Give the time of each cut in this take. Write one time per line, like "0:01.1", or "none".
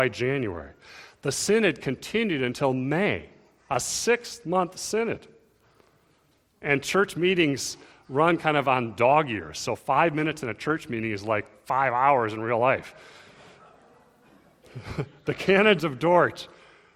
none